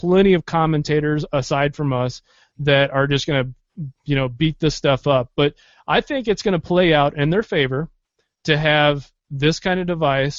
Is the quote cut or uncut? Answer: uncut